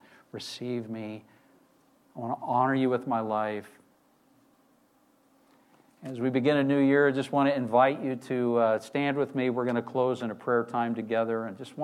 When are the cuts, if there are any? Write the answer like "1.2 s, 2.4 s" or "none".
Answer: none